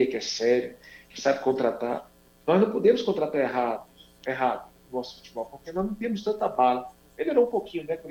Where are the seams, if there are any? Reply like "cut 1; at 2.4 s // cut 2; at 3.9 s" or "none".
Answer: none